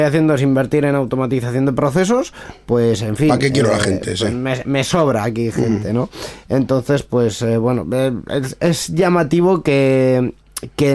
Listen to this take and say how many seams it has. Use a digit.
0